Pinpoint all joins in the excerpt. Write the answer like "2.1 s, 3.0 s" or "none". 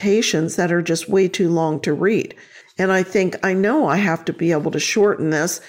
2.6 s